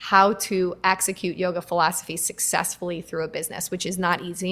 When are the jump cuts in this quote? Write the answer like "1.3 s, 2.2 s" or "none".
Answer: none

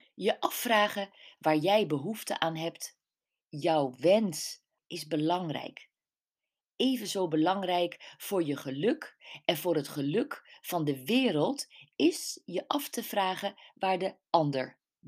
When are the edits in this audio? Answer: 4.8 s

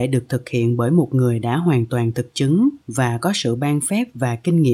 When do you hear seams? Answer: 2.8 s

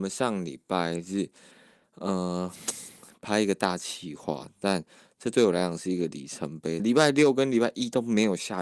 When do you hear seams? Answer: 6.8 s

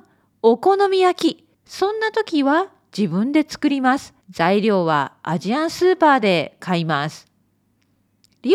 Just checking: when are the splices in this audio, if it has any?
1.5 s, 4.2 s

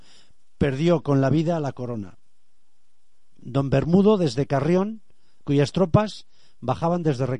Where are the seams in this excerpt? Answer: 3.4 s, 5.4 s

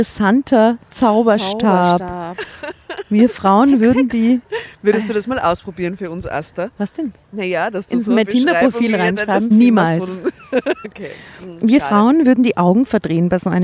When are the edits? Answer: 9.5 s, 10.8 s

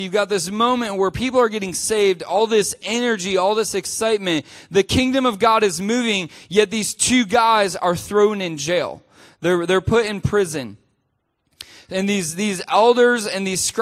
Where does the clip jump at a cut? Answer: none

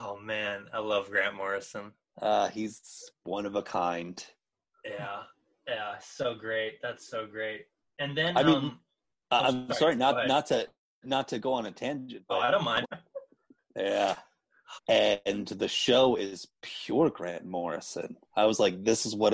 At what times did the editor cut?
12.8 s, 14.8 s

